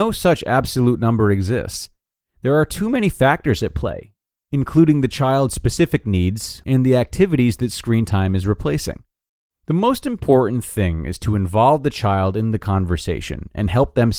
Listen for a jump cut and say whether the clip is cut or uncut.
cut